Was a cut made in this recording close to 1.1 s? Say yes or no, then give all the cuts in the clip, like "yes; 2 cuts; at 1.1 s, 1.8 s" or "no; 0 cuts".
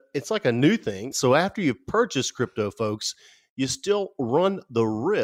yes; 1 cut; at 1.1 s